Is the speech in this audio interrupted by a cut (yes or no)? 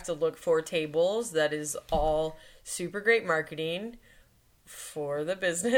no